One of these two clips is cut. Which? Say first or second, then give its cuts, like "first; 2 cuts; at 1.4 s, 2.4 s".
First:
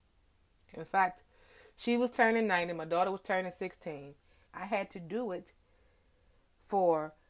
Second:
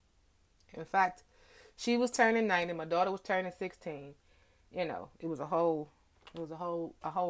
first; 1 cut; at 4.5 s